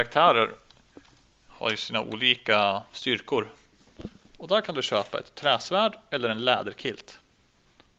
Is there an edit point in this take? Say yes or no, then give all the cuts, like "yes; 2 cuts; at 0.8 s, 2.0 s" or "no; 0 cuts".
yes; 2 cuts; at 1.5 s, 4.3 s